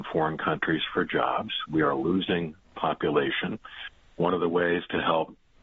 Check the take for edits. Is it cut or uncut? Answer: uncut